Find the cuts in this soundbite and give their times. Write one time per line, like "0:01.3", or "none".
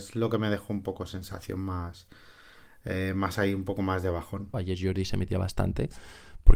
0:04.5